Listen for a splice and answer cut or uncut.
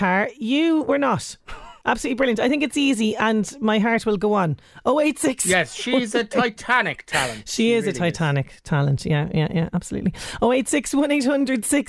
cut